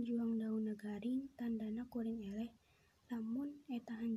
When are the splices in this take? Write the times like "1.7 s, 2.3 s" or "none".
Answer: none